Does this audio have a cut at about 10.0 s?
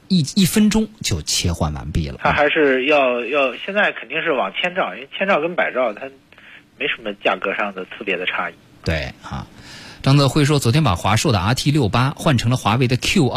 no; 1 cut; at 2.2 s

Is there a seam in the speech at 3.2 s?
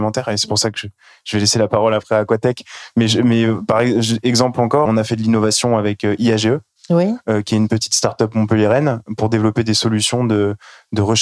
no; 1 cut; at 4.9 s

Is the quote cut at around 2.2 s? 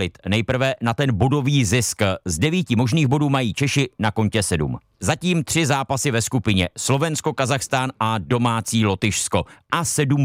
no; 1 cut; at 5.0 s

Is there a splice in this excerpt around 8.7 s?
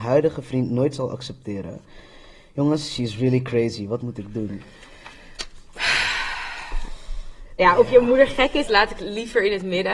yes; 1 cut; at 8.7 s

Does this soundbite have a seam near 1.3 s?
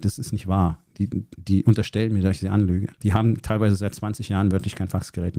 no; 1 cut; at 2.9 s

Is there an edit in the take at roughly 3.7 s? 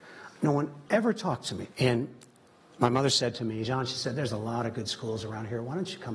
yes; 2 cuts; at 1.7 s, 3.7 s

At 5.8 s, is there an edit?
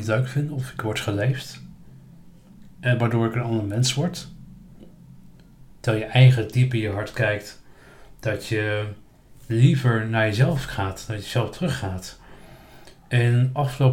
yes; 1 cut; at 5.8 s

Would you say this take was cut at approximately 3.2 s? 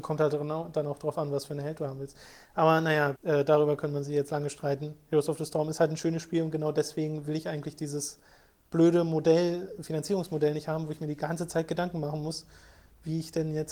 yes; 1 cut; at 3.2 s

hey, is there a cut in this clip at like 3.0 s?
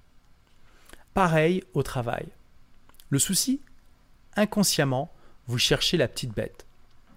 no; 1 cut; at 1.1 s

